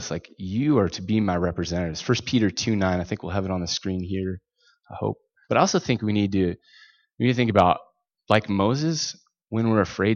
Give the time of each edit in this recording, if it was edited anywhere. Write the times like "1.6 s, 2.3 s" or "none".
5.4 s